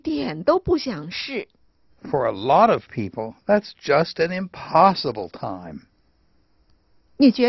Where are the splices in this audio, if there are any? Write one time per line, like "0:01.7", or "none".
0:01.9